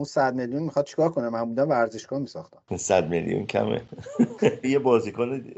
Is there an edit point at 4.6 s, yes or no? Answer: yes